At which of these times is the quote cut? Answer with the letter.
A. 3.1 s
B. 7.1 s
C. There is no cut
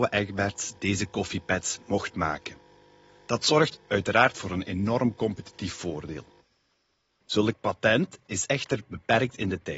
C